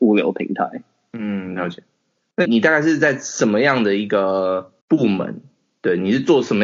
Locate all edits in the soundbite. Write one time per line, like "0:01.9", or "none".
0:02.4
0:04.8